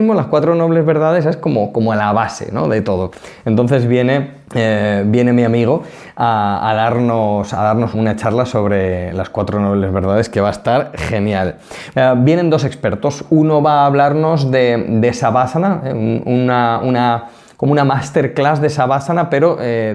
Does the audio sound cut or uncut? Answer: cut